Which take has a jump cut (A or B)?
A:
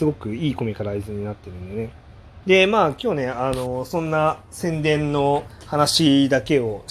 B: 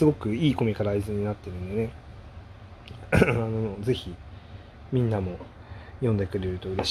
A